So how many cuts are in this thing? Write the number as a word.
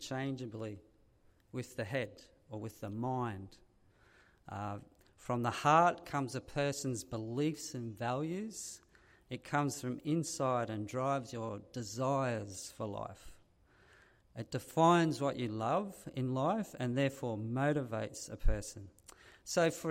zero